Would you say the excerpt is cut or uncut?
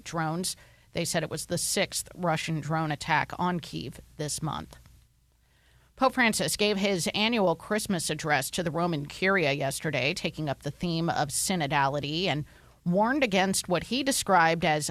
uncut